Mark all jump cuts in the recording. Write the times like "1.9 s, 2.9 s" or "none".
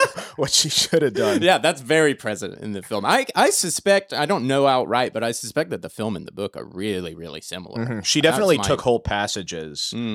none